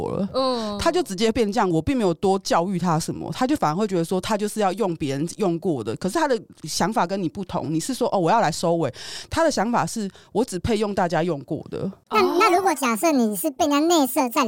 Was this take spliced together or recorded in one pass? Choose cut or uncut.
uncut